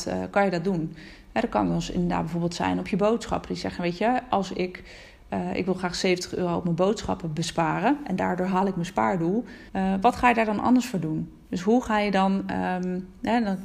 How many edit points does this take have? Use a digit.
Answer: 1